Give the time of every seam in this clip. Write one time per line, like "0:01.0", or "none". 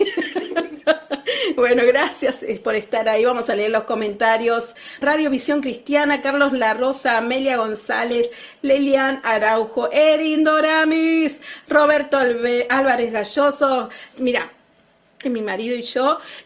0:05.0
0:14.1
0:15.2